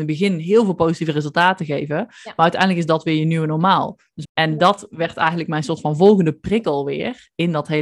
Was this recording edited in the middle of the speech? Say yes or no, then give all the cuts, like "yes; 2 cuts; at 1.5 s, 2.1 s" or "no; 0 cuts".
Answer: yes; 1 cut; at 4.2 s